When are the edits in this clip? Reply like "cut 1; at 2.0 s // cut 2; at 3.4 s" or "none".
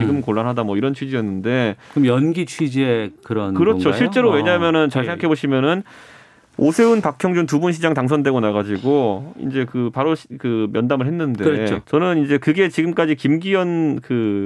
cut 1; at 11.8 s